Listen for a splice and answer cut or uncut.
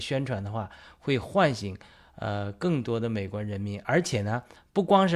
uncut